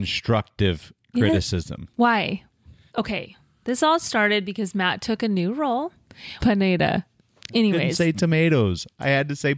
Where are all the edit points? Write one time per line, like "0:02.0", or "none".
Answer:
0:02.9
0:06.4